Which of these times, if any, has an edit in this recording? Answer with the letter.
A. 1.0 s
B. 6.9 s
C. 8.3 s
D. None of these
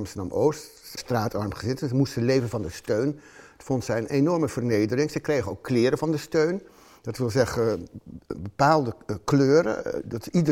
A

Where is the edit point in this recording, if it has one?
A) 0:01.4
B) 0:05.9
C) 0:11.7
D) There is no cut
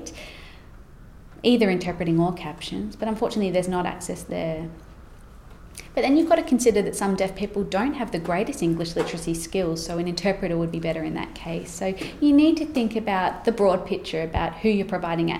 D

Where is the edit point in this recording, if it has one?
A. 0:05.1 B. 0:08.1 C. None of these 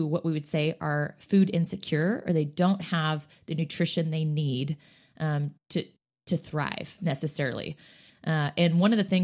B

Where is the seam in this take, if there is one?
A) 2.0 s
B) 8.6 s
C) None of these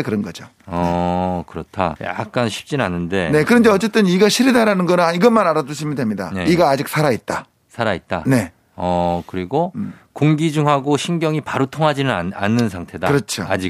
A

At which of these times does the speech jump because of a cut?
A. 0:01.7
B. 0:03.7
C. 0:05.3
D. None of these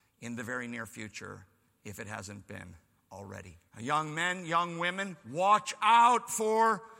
B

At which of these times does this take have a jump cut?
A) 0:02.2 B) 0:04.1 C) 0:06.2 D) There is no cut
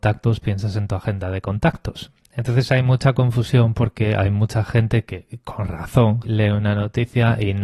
C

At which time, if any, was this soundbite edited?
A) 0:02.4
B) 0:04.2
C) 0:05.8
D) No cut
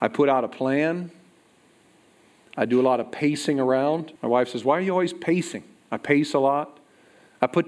B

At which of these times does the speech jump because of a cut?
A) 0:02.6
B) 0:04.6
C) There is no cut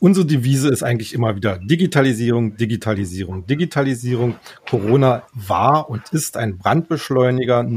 C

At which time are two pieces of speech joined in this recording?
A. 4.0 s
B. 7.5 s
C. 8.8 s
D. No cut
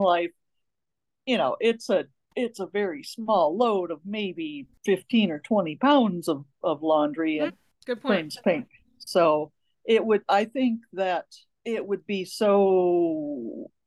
B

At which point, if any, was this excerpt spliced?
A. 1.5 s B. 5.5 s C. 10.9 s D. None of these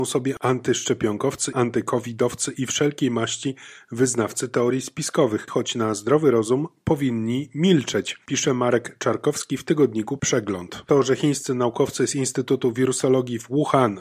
B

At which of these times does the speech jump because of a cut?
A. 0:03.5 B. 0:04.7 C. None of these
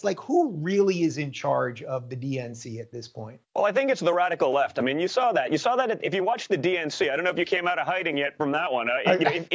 A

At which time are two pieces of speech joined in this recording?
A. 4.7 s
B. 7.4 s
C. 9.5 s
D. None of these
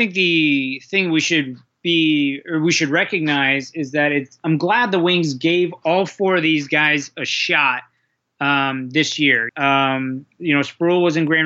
C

